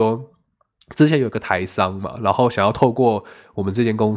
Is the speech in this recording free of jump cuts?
yes; 0 cuts

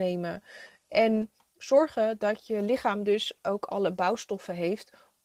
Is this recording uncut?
yes; 0 cuts

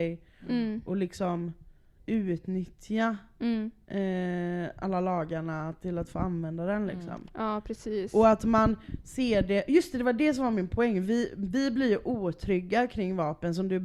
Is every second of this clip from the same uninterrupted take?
yes; 0 cuts

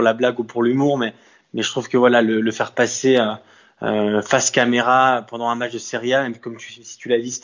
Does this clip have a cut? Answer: no; 0 cuts

